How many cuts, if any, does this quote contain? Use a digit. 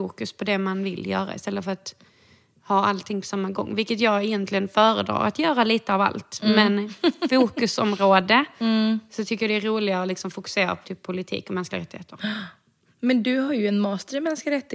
1